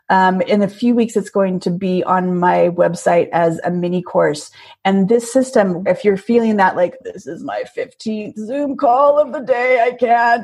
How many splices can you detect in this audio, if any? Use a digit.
2